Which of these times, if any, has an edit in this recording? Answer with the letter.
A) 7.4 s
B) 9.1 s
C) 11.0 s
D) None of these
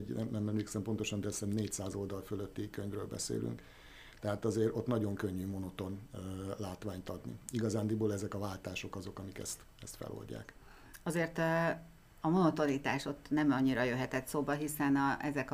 D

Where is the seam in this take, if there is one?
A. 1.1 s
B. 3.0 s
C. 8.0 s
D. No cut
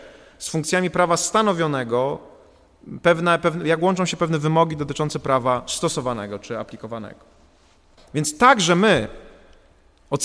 C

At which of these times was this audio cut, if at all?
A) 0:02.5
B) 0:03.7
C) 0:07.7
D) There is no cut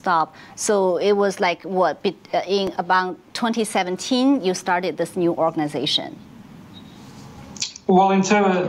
D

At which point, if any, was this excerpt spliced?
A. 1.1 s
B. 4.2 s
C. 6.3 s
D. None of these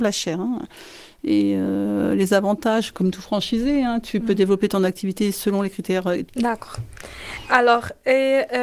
C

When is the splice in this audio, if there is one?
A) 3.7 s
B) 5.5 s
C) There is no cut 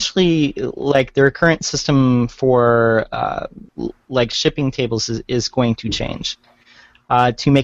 A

